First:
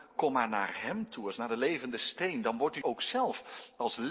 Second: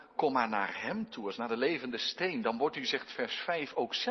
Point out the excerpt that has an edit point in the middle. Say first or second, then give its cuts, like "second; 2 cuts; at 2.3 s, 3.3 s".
first; 1 cut; at 2.8 s